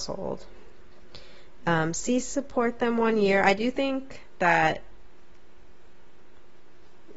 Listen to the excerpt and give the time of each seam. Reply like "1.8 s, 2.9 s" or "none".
none